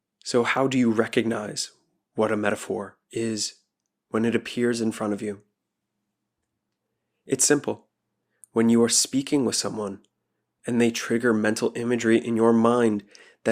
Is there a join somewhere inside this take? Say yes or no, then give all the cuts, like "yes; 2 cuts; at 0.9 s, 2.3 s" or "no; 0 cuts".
no; 0 cuts